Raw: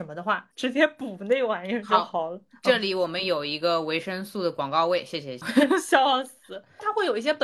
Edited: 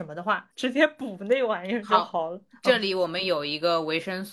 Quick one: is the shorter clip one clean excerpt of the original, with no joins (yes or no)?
yes